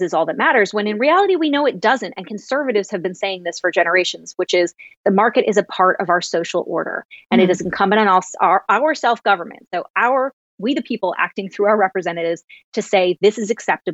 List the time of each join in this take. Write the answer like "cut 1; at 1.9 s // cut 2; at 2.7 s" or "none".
none